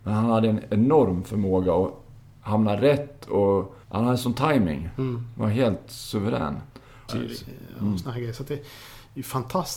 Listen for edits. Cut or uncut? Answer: cut